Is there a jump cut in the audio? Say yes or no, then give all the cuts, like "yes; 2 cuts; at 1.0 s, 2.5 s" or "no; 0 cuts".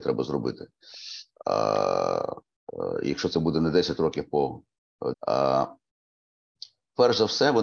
yes; 1 cut; at 5.1 s